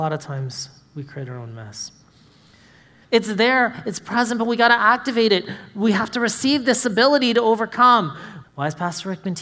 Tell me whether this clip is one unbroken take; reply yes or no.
no